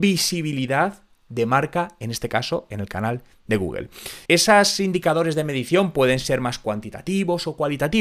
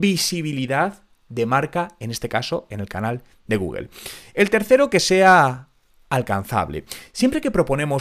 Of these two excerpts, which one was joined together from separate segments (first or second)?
first